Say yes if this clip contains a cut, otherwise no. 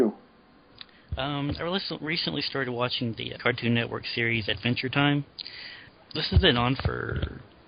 yes